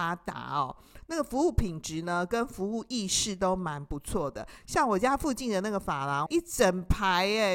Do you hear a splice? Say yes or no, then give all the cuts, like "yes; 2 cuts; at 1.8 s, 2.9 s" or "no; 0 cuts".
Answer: yes; 2 cuts; at 4.6 s, 6.3 s